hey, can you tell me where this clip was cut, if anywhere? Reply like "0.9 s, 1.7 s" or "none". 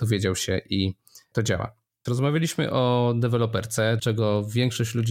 2.1 s, 4.0 s